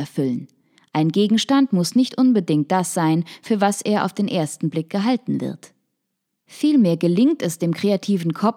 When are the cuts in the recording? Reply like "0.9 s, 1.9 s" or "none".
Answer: none